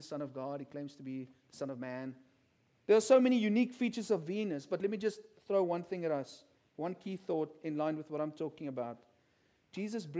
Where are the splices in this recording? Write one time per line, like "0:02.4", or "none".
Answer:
0:02.8